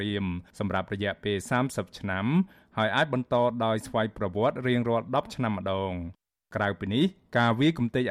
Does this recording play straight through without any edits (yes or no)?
yes